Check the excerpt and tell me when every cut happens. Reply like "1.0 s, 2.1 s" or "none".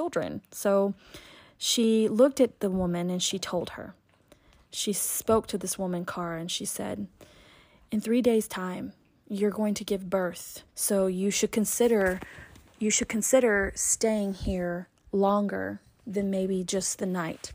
10.7 s